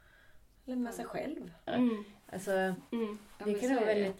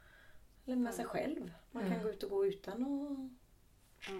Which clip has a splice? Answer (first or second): first